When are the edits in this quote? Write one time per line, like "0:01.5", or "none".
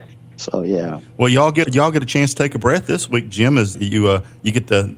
0:01.6
0:03.7